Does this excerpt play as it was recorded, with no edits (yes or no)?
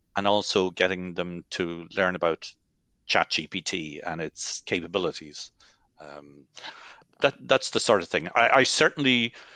no